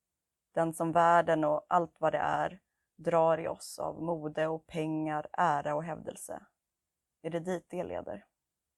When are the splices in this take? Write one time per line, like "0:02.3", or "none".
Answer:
none